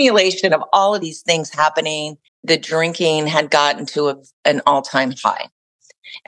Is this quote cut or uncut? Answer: cut